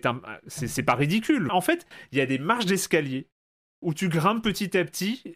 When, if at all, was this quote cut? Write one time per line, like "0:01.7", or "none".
0:01.5